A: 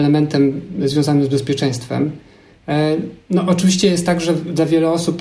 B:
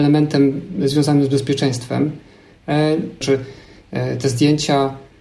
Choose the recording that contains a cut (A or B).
B